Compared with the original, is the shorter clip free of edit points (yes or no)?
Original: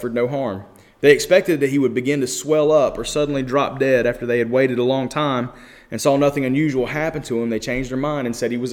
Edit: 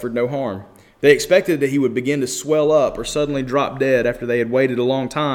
yes